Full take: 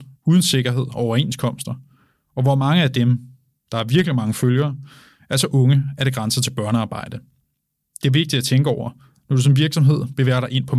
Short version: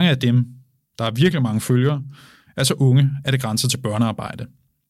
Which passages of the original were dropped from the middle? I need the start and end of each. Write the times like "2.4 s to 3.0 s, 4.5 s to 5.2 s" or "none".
none